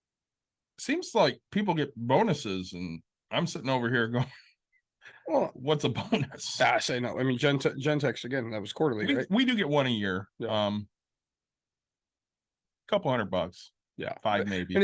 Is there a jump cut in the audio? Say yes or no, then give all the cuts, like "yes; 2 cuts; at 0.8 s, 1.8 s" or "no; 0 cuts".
no; 0 cuts